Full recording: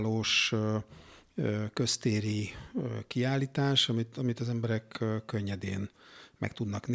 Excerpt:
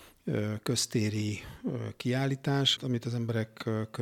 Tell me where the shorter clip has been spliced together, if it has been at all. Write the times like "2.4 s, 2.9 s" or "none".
2.8 s